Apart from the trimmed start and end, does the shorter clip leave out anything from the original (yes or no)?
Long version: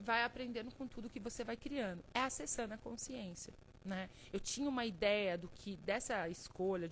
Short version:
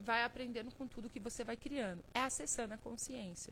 no